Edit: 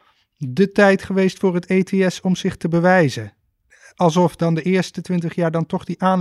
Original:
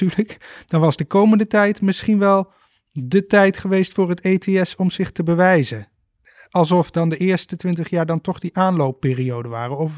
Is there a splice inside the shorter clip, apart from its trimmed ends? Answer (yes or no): no